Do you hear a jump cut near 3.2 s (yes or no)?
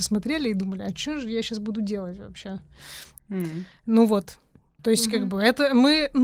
yes